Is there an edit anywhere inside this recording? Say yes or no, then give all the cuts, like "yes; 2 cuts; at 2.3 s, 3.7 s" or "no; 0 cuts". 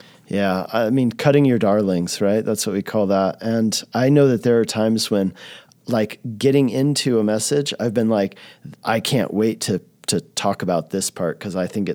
no; 0 cuts